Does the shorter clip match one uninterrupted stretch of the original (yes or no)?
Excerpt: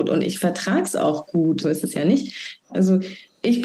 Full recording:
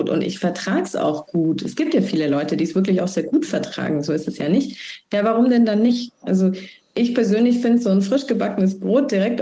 no